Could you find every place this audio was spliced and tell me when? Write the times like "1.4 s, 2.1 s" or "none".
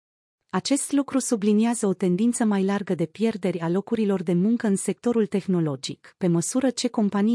none